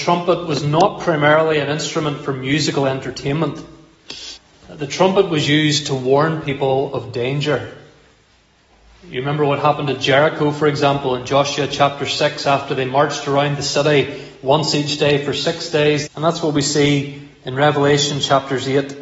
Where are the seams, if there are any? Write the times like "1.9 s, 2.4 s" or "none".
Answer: 16.1 s